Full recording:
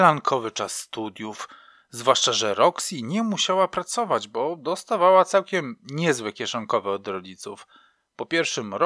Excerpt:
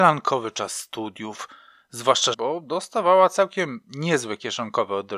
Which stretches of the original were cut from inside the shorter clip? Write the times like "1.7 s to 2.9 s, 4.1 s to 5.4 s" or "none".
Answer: 2.3 s to 4.3 s

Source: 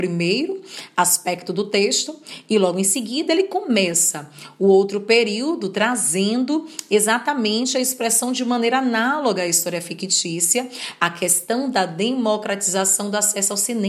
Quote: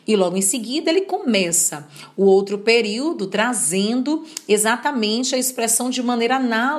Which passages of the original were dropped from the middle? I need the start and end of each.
none

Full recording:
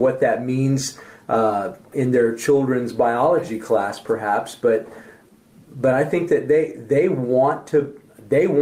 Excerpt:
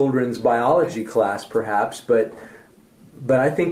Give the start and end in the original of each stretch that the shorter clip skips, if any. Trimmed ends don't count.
none

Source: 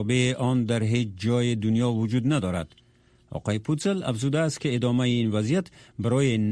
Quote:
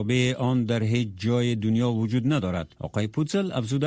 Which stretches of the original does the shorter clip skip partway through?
2.7 s to 3.3 s

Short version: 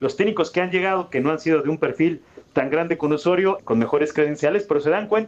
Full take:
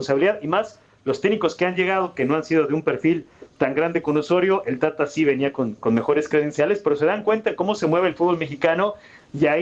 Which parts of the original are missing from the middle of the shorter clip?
4.6 s to 5.8 s

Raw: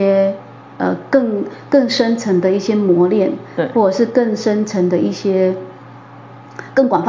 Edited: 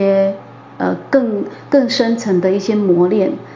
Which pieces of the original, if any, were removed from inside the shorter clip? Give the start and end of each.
none

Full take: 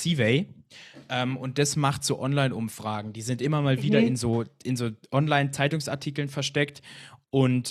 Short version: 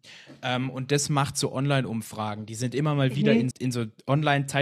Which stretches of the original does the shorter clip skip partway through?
4.2 s to 4.6 s

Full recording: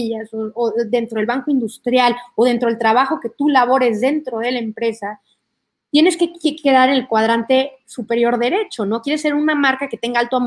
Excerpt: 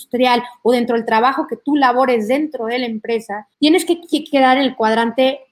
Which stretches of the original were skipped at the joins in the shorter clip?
5.3 s to 5.8 s

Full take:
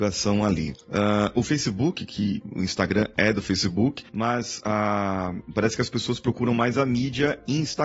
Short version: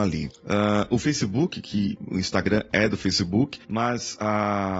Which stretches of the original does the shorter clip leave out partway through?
none

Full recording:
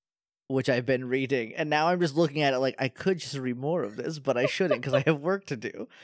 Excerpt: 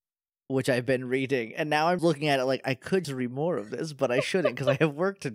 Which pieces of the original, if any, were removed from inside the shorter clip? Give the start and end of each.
2.0 s to 2.1 s, 3.2 s to 3.3 s

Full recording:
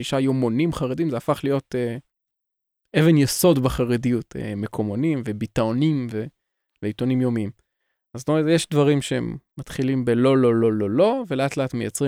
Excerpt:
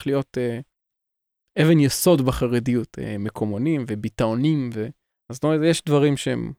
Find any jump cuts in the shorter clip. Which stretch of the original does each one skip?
6.5 s to 7.9 s

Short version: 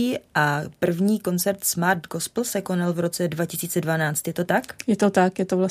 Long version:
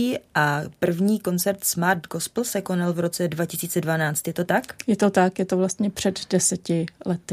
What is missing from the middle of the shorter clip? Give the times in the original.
none

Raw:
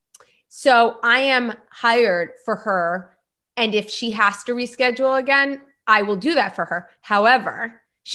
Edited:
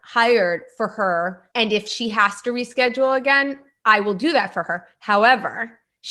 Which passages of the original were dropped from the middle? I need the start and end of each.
3.2 s to 3.5 s

